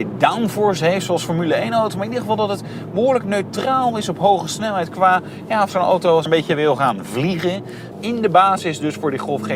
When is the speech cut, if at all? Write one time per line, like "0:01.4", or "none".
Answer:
0:07.9